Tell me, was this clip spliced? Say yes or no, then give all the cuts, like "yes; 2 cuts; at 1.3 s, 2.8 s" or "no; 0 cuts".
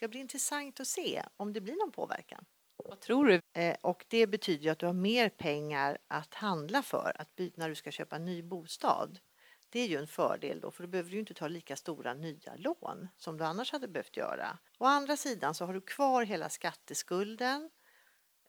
yes; 2 cuts; at 3.4 s, 14.7 s